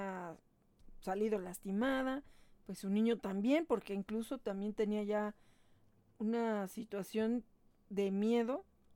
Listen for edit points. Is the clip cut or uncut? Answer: uncut